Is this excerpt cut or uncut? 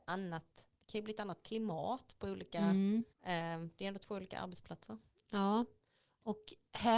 cut